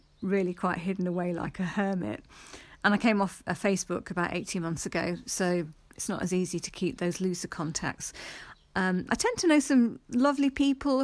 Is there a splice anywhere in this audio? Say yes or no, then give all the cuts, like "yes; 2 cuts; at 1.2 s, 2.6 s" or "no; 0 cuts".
no; 0 cuts